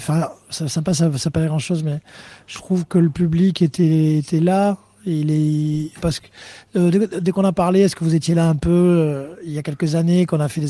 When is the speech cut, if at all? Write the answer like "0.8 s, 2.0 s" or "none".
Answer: 6.0 s